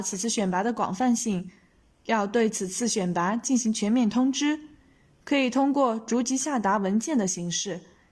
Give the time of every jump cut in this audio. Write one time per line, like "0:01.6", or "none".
0:01.9